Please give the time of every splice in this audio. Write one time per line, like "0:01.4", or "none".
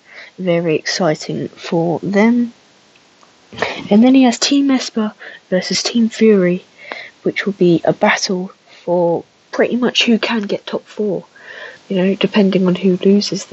none